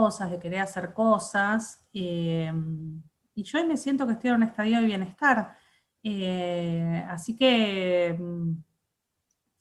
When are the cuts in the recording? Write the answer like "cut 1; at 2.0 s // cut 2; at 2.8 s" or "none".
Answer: none